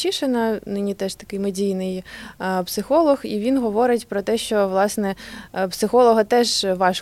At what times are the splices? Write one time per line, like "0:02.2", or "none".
none